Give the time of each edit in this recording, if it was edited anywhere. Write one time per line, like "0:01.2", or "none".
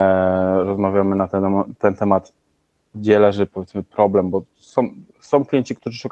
none